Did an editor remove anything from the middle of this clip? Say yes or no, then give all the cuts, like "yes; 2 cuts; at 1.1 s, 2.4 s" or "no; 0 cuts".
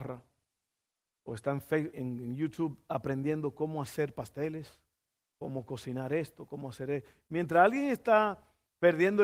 yes; 1 cut; at 1.9 s